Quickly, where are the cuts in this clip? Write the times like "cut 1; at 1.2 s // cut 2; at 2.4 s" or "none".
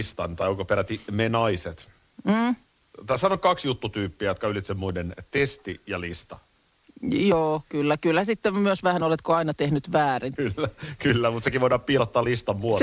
cut 1; at 10.4 s